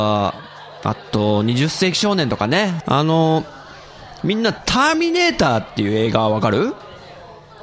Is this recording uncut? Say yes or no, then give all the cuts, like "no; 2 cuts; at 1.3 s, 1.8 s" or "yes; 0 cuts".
no; 1 cut; at 2.8 s